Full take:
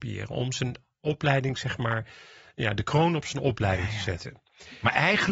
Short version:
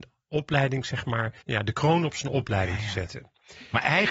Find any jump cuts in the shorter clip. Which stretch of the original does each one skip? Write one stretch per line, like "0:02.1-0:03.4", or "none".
0:02.1-0:02.5